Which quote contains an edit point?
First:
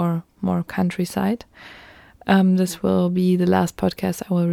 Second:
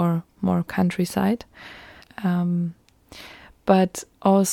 second; 1 cut; at 2.0 s

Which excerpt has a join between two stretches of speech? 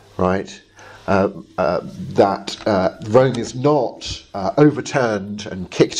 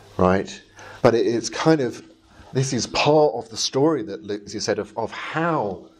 second; 2 cuts; at 1.0 s, 4.5 s

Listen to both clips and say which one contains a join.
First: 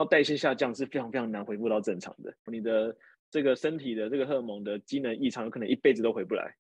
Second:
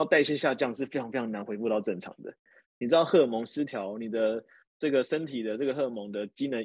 first; 1 cut; at 2.5 s

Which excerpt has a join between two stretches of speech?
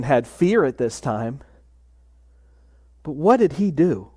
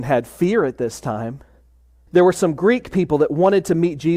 second; 1 cut; at 2.1 s

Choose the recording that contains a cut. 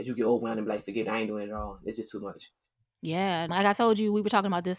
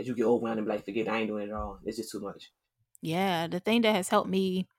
first; 1 cut; at 3.5 s

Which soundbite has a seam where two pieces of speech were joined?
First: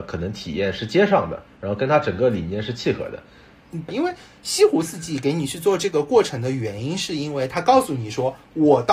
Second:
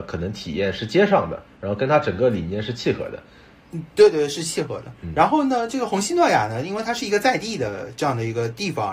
first; 1 cut; at 3.9 s

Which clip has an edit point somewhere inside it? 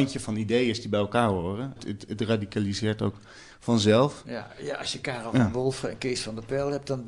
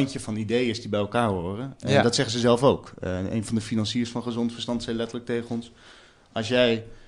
first; 1 cut; at 1.8 s

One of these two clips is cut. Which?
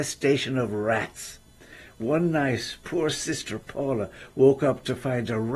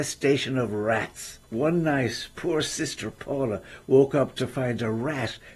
second; 1 cut; at 1.4 s

